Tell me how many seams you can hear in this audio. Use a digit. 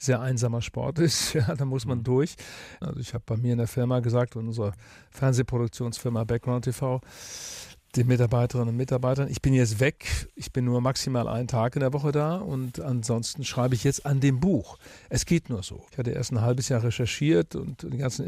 2